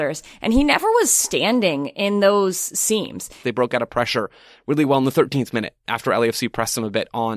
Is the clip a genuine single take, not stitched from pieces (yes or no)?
no